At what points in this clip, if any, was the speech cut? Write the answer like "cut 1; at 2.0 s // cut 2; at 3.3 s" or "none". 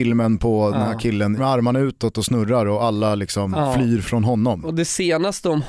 cut 1; at 1.4 s